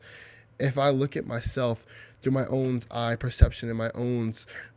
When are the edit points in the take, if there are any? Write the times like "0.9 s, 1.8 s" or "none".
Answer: none